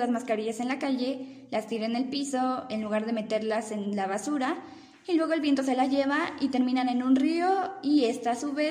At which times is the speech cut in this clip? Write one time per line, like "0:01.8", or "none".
none